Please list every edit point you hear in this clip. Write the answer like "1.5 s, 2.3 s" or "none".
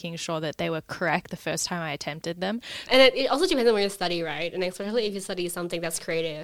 2.9 s

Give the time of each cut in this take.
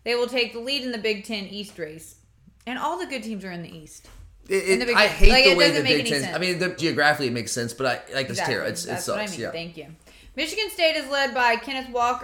6.8 s, 8.3 s

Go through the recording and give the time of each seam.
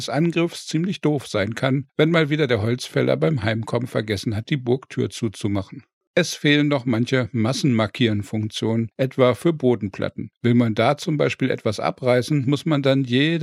6.1 s

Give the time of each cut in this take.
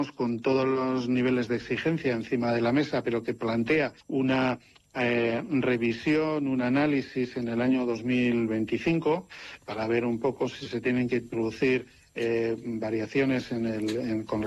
4.0 s

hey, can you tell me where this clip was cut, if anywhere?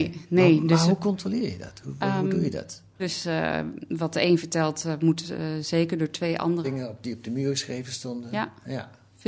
3.0 s, 6.6 s

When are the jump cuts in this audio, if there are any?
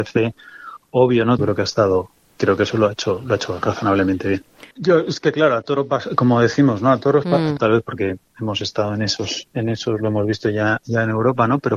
1.4 s, 4.7 s, 7.6 s

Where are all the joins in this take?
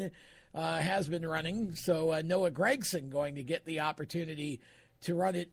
none

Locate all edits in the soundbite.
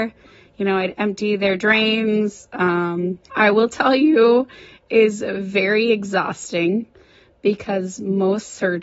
3.3 s

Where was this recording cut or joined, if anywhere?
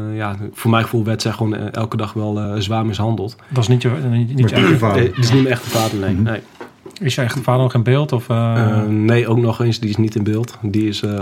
none

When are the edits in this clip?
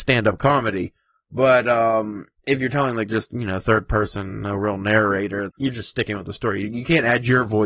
5.5 s

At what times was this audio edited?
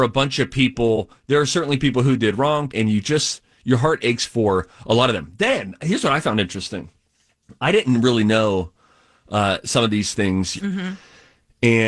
2.7 s, 10.6 s

